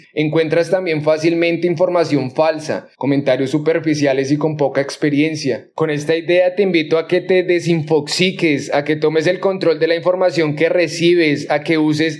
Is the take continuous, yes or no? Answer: no